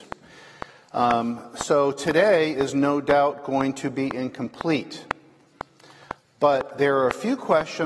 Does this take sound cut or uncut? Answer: uncut